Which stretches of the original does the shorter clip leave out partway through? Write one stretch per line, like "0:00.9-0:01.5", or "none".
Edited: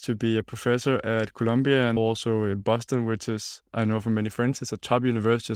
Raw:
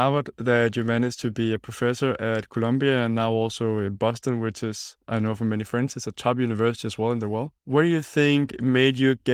0:03.1-0:03.3